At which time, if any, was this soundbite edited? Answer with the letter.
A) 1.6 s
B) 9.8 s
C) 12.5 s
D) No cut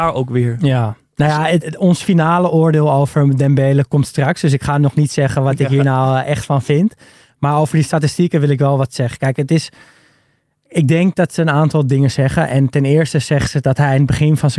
A